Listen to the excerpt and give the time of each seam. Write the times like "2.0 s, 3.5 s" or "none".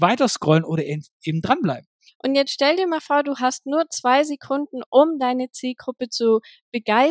none